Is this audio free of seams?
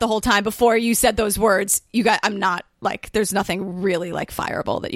yes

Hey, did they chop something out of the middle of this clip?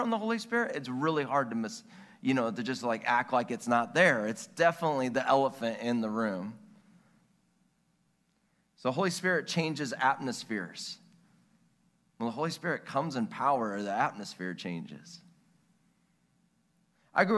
no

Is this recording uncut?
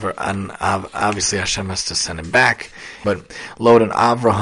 no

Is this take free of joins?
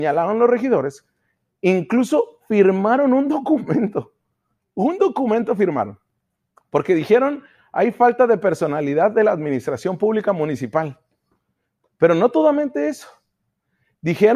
yes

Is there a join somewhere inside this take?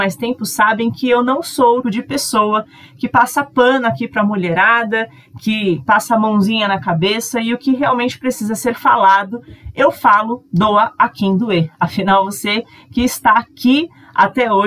yes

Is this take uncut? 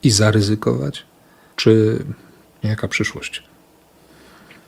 no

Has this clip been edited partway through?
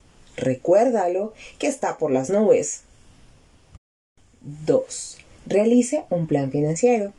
no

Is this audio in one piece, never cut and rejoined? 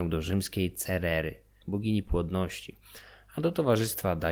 no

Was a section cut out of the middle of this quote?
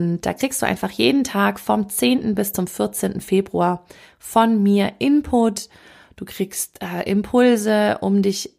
no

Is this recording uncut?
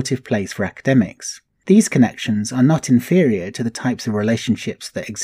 no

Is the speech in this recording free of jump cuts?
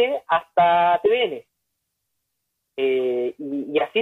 yes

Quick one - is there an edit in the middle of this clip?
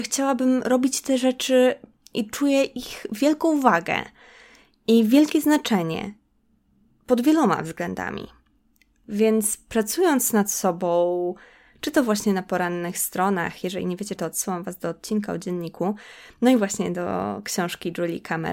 yes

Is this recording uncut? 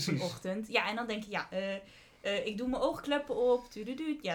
yes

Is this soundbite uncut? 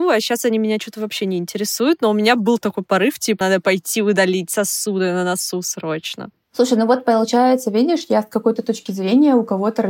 no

